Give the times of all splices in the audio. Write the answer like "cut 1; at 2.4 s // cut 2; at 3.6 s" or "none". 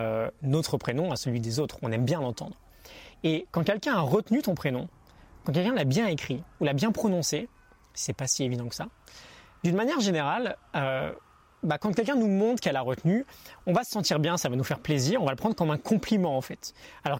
none

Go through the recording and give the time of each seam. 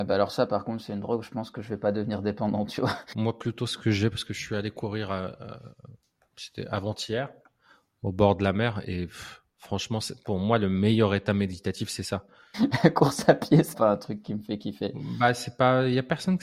cut 1; at 3.1 s // cut 2; at 12.5 s // cut 3; at 13.7 s

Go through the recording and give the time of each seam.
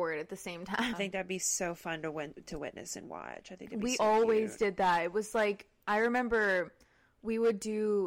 cut 1; at 0.9 s // cut 2; at 4.0 s

